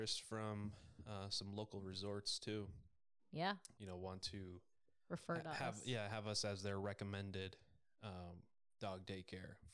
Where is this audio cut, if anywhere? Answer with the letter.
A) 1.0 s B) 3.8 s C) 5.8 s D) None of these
B